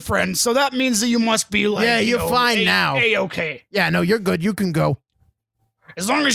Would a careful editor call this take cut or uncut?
uncut